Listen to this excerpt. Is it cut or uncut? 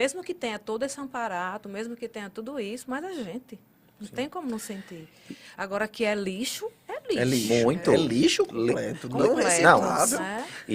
uncut